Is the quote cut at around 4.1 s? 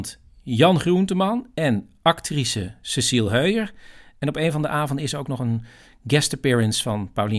no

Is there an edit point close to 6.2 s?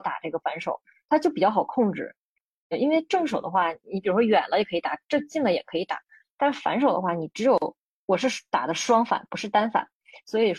no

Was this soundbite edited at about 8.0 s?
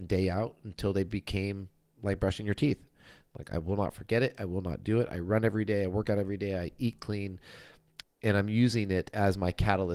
yes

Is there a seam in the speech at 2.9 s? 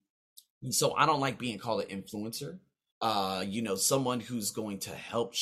yes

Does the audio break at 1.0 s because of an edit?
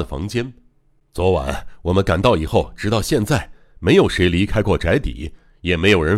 yes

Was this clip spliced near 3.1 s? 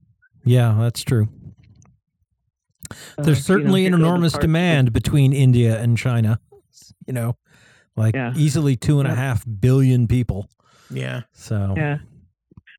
no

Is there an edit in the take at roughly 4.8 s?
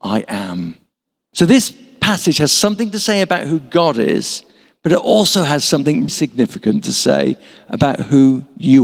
no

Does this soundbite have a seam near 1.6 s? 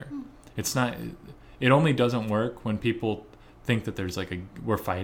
no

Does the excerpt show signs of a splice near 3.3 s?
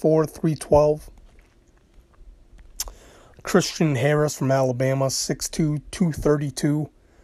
yes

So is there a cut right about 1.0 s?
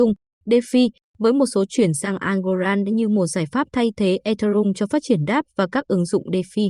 yes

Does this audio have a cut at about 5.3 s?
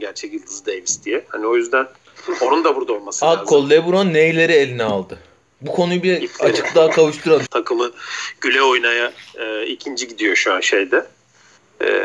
no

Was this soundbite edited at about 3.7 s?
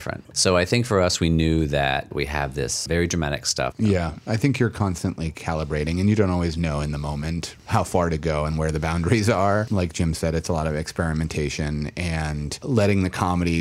yes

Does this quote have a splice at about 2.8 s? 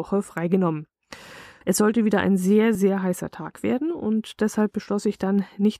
yes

